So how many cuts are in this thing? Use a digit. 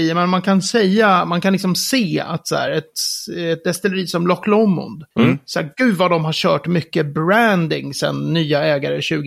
0